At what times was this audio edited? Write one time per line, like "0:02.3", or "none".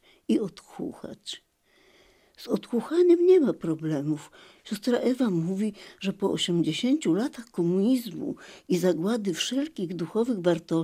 none